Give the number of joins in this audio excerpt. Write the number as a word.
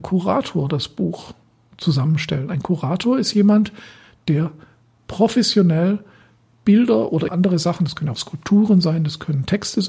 one